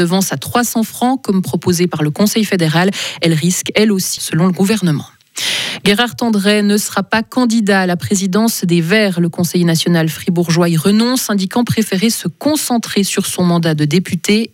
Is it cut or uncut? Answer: cut